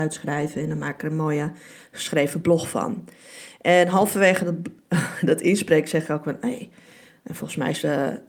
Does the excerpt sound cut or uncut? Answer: uncut